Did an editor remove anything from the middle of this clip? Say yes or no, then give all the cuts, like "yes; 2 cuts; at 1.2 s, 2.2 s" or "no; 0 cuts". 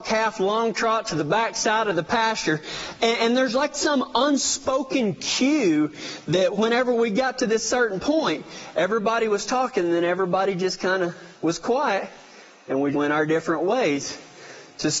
yes; 2 cuts; at 11.3 s, 12.9 s